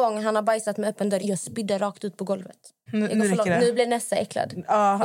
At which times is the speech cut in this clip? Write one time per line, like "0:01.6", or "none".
0:01.2
0:02.9